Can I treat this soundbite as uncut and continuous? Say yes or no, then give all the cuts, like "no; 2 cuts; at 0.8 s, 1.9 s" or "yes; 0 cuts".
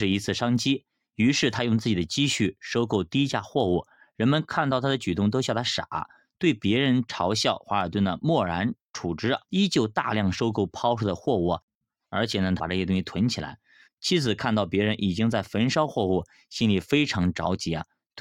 no; 3 cuts; at 9.4 s, 12.6 s, 13.8 s